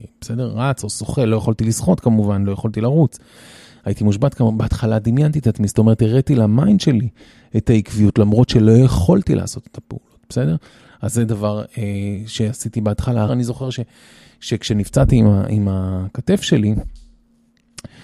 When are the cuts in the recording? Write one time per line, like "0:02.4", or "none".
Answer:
0:13.3

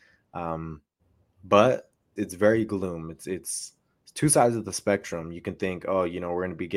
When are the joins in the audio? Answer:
0:02.2

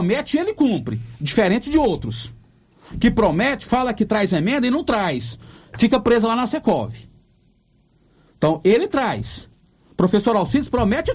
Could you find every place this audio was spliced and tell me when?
none

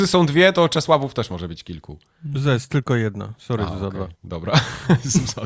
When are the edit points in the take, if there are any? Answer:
0:04.2

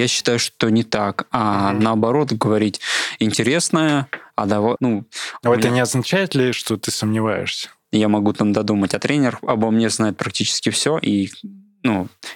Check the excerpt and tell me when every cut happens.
0:04.8
0:07.9

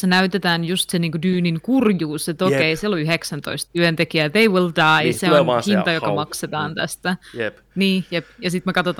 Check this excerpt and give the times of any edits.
none

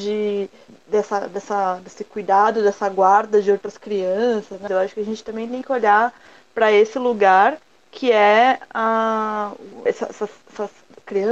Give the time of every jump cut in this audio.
0:04.7
0:09.9

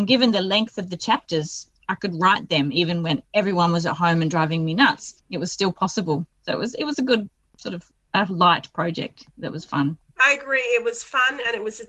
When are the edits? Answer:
none

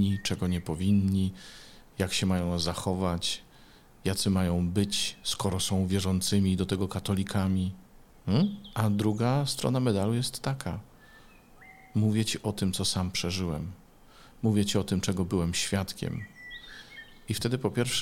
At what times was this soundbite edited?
none

